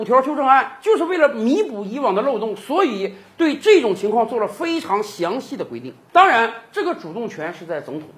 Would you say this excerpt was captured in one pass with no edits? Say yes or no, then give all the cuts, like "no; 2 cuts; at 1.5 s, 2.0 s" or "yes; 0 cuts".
yes; 0 cuts